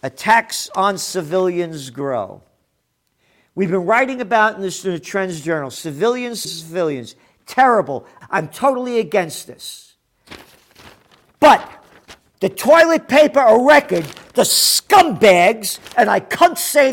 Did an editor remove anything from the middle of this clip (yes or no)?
yes